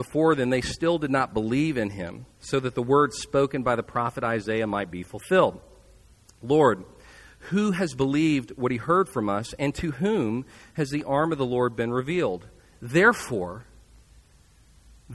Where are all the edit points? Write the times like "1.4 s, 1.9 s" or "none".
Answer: none